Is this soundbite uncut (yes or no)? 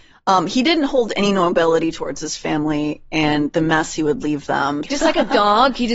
no